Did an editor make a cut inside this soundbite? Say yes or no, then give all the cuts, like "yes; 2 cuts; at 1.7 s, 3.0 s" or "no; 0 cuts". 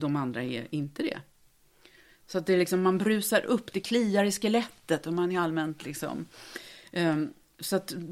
no; 0 cuts